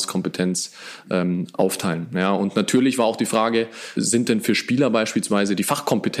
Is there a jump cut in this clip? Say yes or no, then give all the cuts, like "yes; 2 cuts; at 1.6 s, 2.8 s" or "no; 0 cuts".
yes; 1 cut; at 4.0 s